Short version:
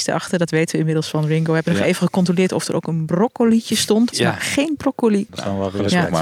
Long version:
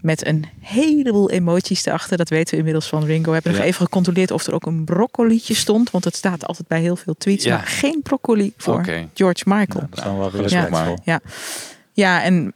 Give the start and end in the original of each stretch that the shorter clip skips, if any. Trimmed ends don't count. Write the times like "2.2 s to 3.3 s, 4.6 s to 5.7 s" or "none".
5.9 s to 7.4 s, 8.5 s to 9.9 s